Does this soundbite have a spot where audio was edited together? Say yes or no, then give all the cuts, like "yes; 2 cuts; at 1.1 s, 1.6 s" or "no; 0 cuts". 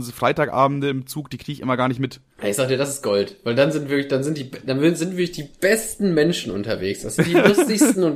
no; 0 cuts